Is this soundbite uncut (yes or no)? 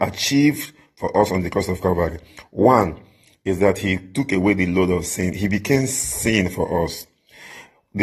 yes